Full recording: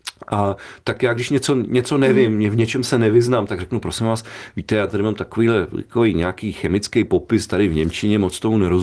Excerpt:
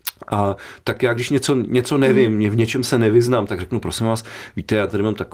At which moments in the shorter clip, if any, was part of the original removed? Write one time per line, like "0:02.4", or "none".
none